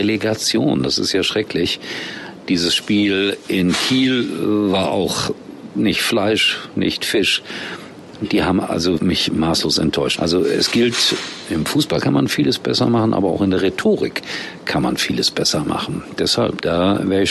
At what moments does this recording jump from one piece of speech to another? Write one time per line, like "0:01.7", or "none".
0:09.0
0:10.2